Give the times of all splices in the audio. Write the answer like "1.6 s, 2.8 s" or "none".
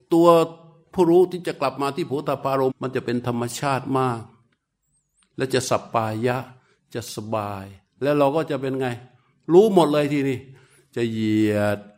2.7 s